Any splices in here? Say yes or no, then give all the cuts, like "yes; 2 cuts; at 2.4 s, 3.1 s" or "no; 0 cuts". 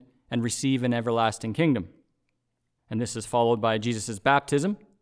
yes; 1 cut; at 2.8 s